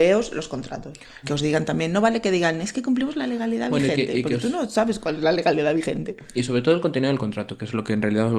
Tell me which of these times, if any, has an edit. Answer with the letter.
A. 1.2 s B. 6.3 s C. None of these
A